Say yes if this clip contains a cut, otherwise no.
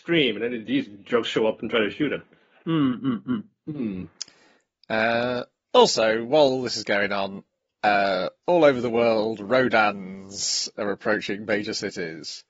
no